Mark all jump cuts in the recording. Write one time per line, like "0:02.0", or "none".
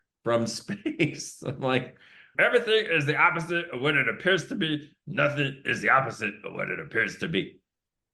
0:02.3